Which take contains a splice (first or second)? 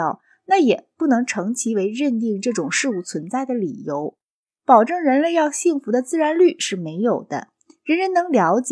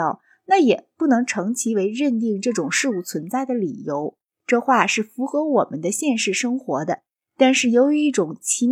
second